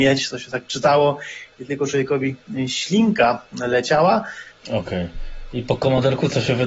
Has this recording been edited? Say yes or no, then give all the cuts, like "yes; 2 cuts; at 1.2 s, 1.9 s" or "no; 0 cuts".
yes; 1 cut; at 4.5 s